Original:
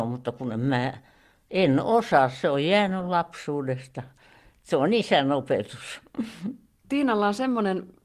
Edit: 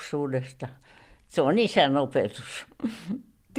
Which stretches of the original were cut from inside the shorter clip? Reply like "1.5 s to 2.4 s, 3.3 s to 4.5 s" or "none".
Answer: none